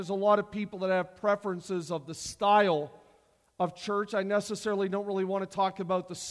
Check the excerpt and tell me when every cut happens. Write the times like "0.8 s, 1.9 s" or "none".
none

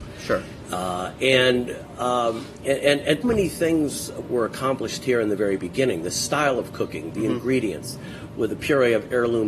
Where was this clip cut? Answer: 3.2 s, 8.3 s

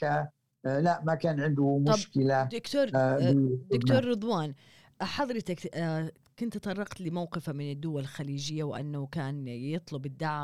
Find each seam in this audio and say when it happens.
none

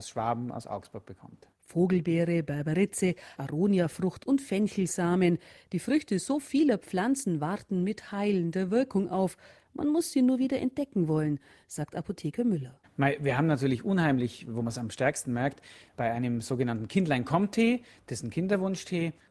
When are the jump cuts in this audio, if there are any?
3.4 s

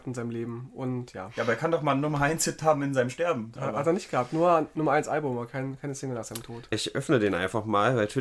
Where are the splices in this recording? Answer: 3.6 s, 6.7 s

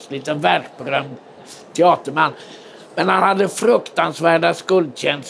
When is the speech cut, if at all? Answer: none

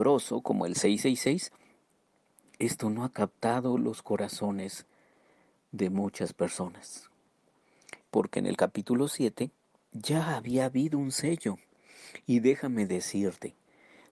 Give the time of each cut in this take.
8.0 s

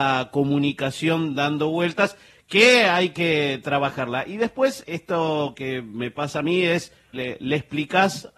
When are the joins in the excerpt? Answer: 4.8 s, 7.1 s

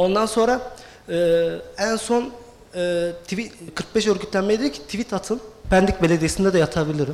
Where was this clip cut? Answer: 3.7 s, 5.6 s

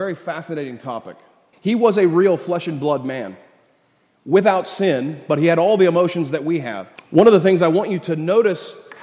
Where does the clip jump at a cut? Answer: 1.5 s, 7.0 s

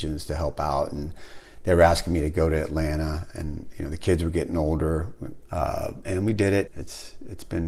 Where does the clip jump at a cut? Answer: 5.4 s, 6.7 s

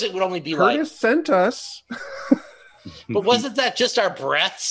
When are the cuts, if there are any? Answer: none

